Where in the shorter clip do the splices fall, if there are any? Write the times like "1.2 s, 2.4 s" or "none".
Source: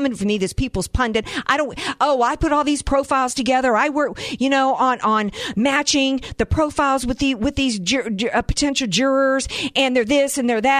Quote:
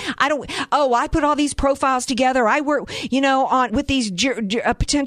3.7 s